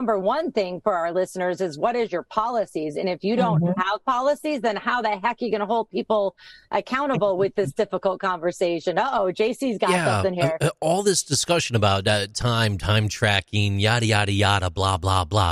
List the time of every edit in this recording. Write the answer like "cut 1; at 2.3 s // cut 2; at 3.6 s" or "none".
none